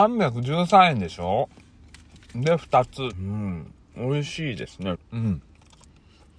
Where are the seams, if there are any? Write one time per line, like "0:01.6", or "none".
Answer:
0:03.1
0:04.9

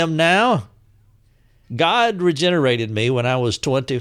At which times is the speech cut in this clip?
0:01.7

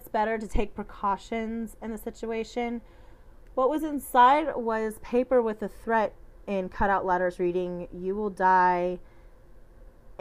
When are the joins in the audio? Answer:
none

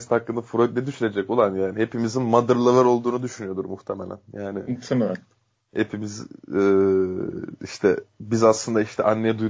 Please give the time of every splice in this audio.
none

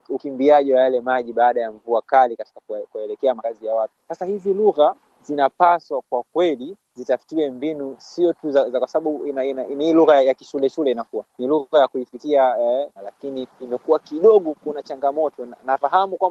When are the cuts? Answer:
0:13.0

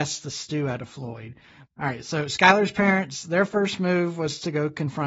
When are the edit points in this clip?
0:01.7

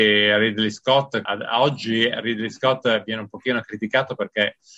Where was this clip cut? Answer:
0:01.3

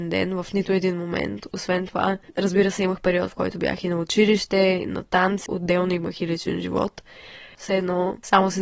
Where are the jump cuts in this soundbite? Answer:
0:05.5
0:07.6

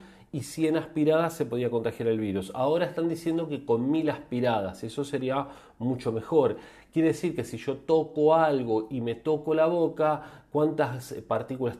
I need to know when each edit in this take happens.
none

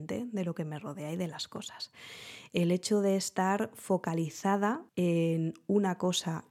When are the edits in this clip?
0:02.5
0:04.9

